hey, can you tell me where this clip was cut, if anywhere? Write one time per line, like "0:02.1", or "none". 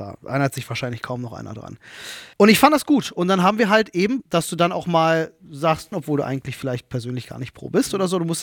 0:02.3
0:04.2
0:05.9